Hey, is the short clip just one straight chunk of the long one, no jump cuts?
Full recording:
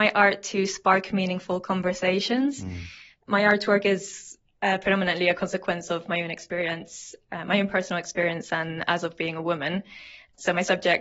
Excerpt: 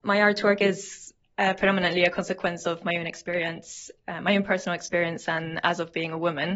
yes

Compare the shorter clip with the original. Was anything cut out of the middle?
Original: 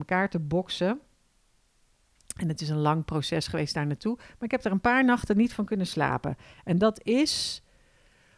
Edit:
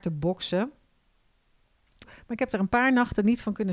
yes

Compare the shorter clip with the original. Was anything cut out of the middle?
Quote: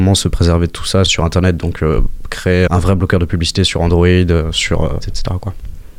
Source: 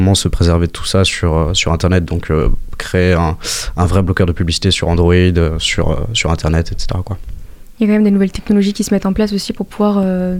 yes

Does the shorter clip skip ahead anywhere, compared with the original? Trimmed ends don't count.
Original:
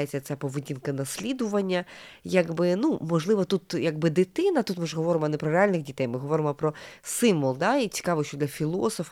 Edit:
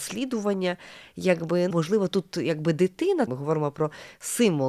yes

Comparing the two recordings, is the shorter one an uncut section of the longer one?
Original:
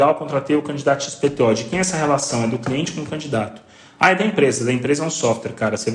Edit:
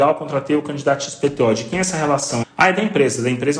no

